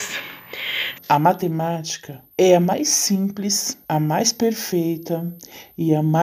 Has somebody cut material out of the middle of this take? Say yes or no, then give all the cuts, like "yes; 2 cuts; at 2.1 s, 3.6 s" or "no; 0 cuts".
yes; 3 cuts; at 0.9 s, 2.3 s, 3.8 s